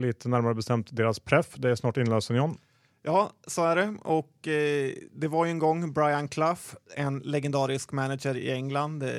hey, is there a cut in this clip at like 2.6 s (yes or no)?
no